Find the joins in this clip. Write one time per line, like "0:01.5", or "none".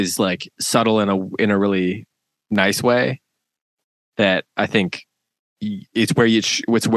0:05.9